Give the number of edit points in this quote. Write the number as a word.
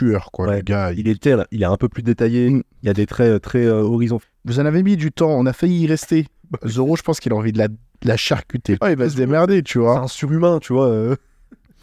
two